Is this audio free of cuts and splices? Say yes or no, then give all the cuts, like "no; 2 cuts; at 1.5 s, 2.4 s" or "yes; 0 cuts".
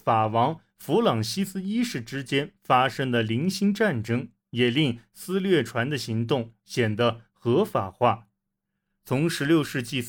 yes; 0 cuts